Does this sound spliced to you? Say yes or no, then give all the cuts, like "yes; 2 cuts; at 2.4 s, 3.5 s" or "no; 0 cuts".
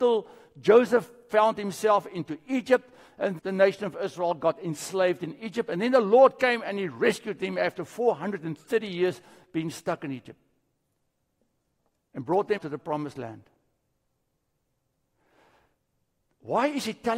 yes; 2 cuts; at 3.4 s, 12.6 s